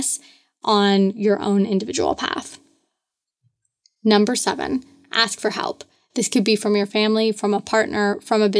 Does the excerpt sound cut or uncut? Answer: uncut